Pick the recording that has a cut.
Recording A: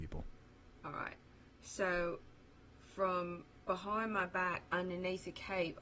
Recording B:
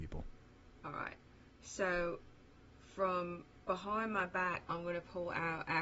B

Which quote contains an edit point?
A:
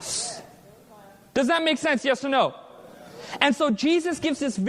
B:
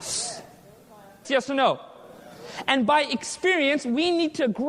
B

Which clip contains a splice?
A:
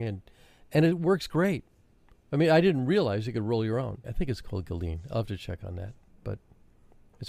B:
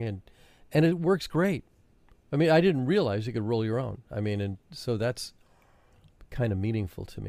A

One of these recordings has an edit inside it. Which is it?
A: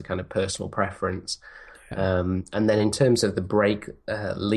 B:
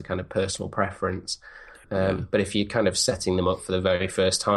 B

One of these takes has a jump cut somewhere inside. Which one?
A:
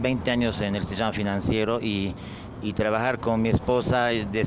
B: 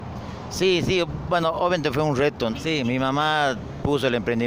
B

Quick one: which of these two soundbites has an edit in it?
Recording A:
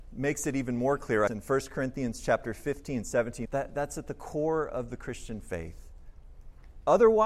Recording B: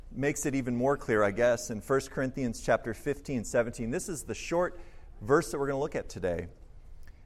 A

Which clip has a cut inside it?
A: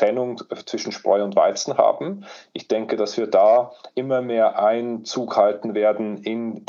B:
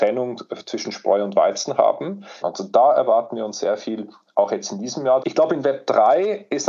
B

